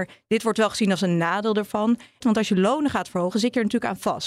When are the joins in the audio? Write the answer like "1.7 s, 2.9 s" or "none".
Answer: 2.2 s